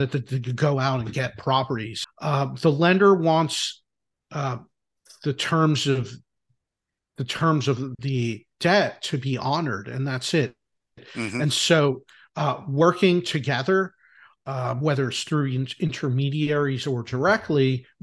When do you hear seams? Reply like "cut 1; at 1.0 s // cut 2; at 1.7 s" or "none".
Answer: cut 1; at 2.0 s

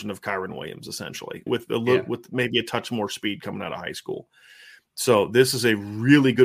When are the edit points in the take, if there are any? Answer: cut 1; at 1.5 s

